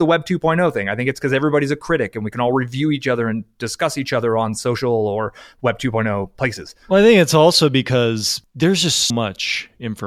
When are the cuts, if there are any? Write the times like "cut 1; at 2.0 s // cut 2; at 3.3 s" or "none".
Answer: cut 1; at 9.1 s